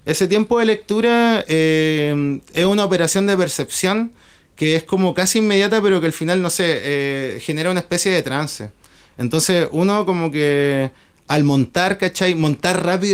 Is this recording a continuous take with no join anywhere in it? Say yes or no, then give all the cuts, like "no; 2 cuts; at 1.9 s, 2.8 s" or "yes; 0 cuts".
yes; 0 cuts